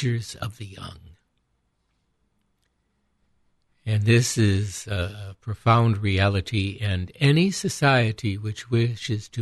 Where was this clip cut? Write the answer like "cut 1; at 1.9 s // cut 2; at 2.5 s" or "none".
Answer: none

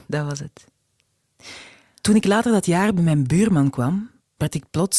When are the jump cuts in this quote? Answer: none

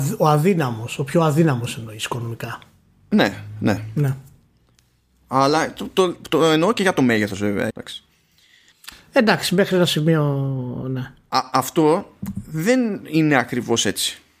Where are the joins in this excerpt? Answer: cut 1; at 7.7 s

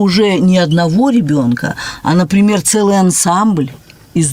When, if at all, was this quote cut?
none

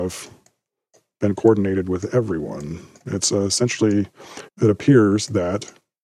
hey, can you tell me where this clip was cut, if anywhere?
cut 1; at 4.5 s

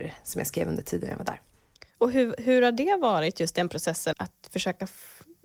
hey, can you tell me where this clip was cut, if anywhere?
cut 1; at 4.1 s

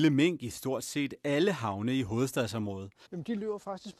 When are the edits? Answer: cut 1; at 3.1 s

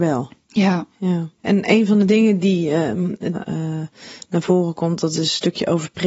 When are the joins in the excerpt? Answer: cut 1; at 1.4 s // cut 2; at 3.3 s

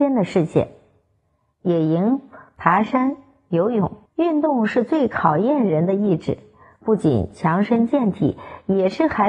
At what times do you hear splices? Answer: cut 1; at 4.1 s

